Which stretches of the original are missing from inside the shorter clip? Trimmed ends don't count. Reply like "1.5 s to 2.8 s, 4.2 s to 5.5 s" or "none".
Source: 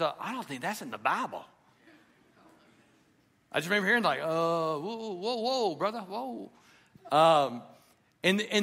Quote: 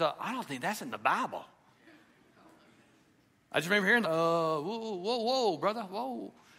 4.0 s to 4.2 s